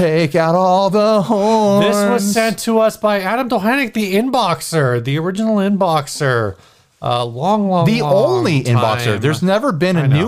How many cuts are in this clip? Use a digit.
0